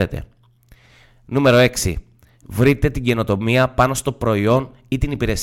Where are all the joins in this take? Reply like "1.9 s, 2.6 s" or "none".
none